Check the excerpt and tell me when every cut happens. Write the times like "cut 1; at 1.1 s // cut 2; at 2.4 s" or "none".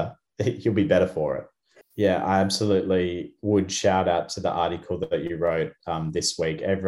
cut 1; at 1.8 s